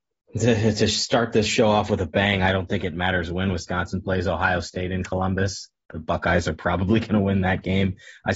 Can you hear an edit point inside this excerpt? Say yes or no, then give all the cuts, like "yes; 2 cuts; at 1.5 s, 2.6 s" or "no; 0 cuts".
no; 0 cuts